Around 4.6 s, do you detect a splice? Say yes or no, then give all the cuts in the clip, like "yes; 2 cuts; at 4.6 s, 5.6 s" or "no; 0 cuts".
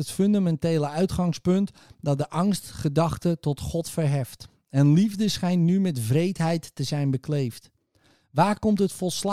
yes; 1 cut; at 4.6 s